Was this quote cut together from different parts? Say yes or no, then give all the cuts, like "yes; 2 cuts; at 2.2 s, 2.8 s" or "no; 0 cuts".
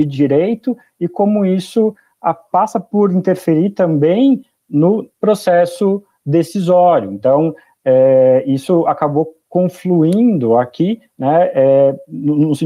no; 0 cuts